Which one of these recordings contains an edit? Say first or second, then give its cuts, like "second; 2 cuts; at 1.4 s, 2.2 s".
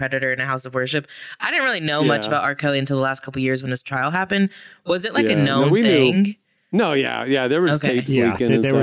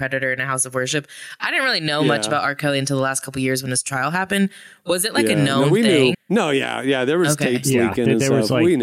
second; 1 cut; at 6.1 s